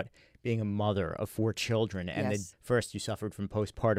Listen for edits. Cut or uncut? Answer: cut